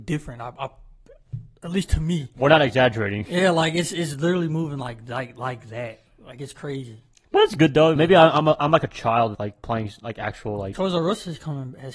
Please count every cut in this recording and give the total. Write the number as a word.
two